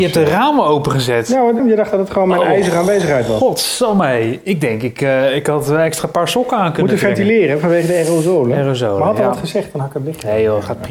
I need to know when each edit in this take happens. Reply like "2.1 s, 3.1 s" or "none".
1.6 s